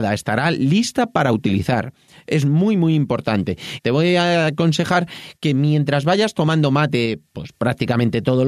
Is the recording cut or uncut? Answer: cut